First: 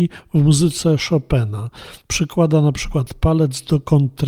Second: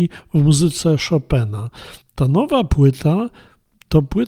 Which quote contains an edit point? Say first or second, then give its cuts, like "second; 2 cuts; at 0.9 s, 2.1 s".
second; 1 cut; at 2.0 s